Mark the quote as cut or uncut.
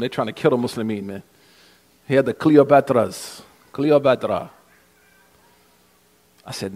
uncut